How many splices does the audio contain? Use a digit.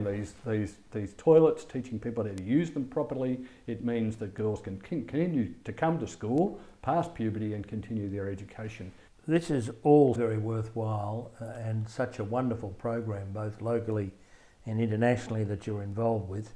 2